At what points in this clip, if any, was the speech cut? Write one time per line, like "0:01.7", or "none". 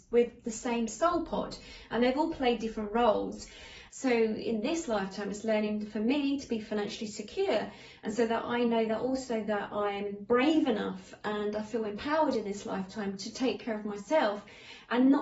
0:03.9